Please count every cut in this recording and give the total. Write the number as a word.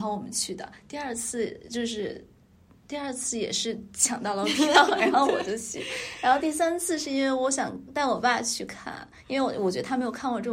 zero